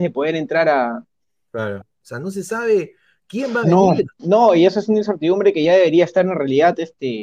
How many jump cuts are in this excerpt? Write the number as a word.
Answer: two